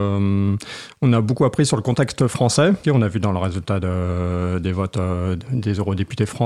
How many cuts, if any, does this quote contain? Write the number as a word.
one